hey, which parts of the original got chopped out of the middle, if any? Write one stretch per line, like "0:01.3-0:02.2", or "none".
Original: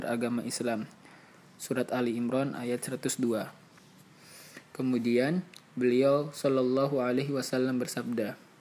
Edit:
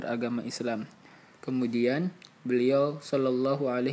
0:01.3-0:04.7